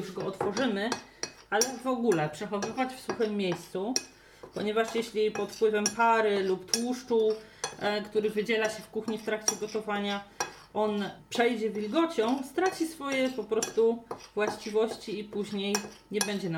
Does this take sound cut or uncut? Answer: uncut